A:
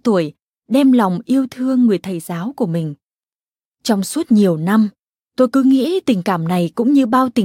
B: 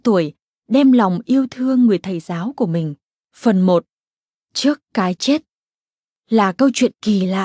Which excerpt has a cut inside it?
B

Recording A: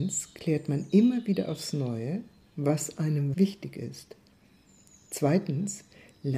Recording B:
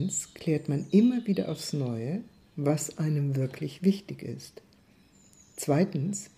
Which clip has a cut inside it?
A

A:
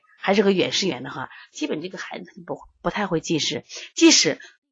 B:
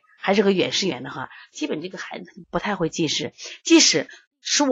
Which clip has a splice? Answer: B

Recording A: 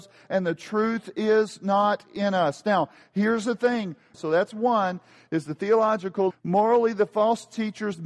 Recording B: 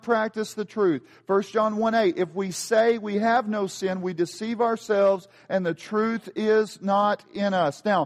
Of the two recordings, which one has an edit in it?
A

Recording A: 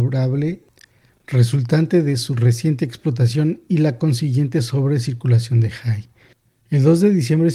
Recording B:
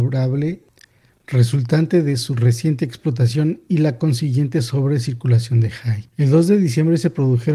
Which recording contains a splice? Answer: B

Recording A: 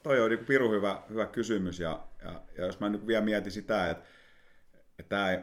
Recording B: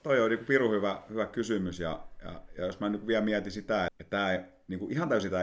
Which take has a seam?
B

